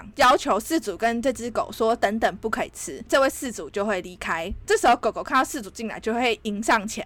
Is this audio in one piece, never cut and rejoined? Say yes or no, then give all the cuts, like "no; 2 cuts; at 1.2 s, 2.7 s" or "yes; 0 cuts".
no; 1 cut; at 4.7 s